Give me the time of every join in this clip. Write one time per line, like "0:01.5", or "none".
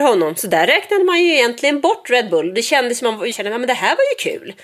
0:03.3